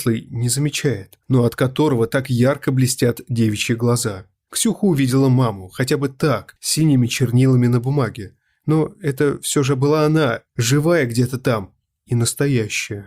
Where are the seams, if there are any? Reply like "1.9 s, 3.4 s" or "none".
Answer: none